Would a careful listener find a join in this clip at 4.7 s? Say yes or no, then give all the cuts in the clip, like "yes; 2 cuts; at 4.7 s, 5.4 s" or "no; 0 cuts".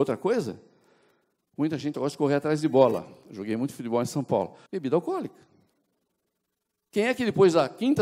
yes; 2 cuts; at 1.9 s, 4.7 s